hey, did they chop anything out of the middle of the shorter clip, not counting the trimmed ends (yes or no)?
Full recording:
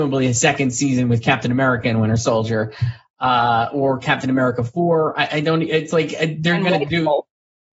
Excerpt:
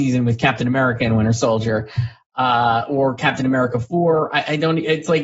no